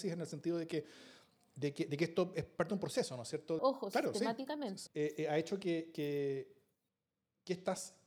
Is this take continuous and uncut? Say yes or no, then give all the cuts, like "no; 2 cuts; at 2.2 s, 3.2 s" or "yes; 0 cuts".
no; 2 cuts; at 3.6 s, 4.9 s